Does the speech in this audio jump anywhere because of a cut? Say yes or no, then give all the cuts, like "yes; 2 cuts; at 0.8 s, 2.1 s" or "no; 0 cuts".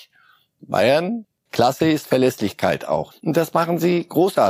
yes; 1 cut; at 3.1 s